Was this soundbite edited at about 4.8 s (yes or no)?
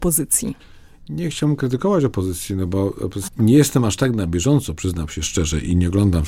no